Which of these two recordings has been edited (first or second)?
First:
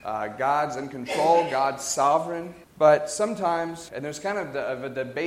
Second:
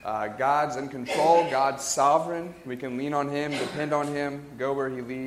first